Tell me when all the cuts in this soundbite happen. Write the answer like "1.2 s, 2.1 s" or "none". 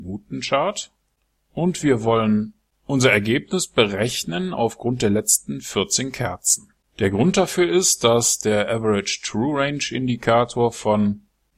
none